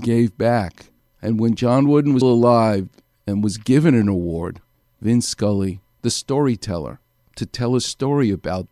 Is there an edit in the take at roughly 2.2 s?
yes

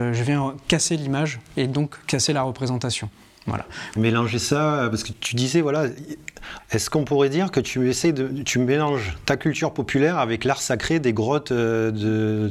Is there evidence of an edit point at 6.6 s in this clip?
yes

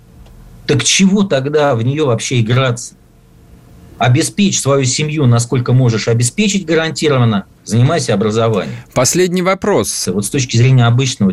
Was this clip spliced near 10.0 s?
yes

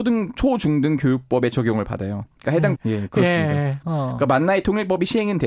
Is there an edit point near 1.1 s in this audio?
no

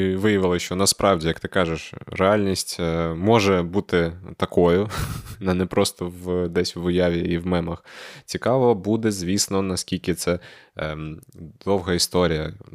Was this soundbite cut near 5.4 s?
no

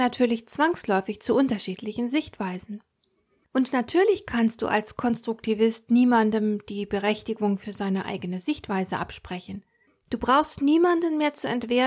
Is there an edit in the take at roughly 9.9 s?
yes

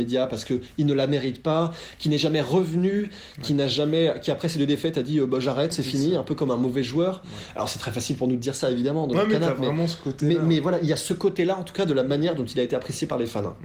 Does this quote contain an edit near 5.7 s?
yes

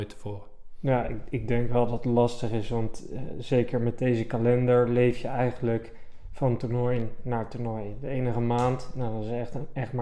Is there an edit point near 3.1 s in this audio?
no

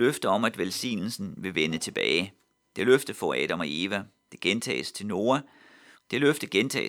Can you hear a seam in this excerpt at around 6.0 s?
yes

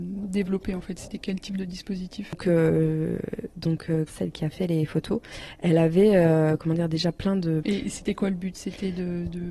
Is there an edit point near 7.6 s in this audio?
yes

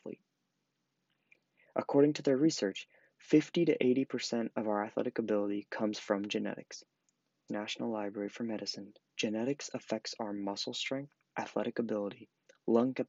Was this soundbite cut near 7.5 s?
yes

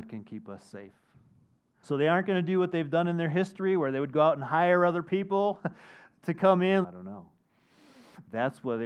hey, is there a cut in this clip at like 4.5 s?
no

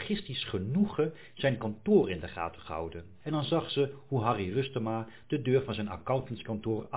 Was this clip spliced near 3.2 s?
yes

